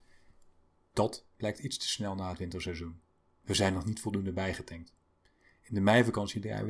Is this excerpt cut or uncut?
cut